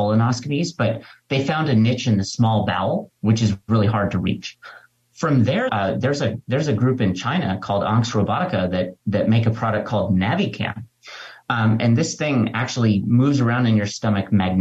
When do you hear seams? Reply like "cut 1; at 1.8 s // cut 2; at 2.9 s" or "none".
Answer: cut 1; at 5.7 s